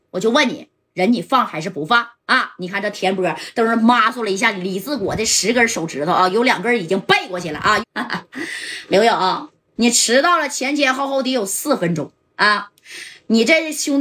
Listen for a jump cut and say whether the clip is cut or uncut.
cut